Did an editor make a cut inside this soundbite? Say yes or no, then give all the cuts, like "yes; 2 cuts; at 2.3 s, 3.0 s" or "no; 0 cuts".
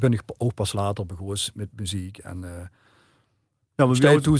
no; 0 cuts